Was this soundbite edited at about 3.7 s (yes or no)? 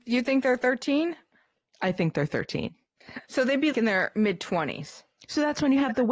yes